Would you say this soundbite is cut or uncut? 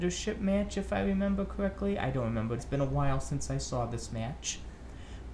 cut